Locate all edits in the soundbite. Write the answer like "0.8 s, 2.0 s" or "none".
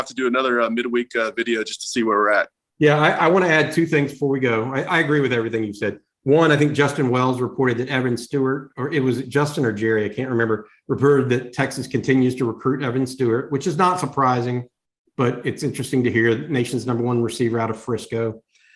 none